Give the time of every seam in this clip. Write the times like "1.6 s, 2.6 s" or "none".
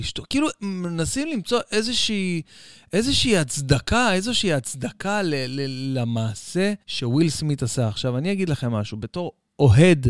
6.8 s

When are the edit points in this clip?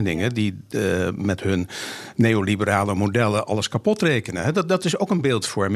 none

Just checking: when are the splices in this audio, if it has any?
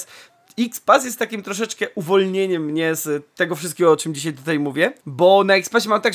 5.0 s

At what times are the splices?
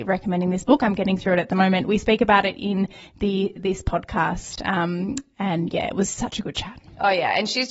none

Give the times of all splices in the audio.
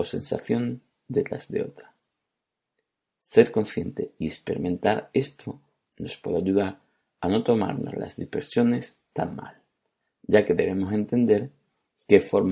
none

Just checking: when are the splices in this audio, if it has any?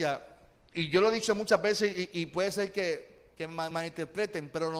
3.7 s

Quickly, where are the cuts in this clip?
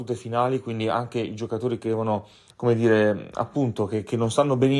2.5 s

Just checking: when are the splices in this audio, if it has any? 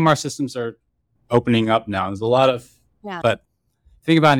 3.2 s

